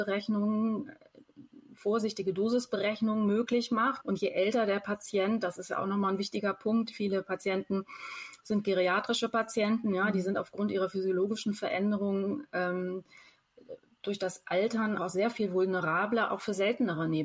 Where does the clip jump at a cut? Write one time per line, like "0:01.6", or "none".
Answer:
0:04.0
0:15.0